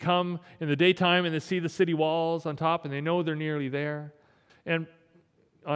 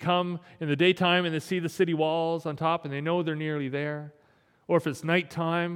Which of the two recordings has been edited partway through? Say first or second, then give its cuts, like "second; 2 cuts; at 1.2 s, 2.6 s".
first; 1 cut; at 4.5 s